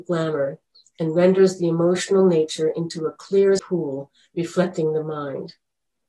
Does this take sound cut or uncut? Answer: cut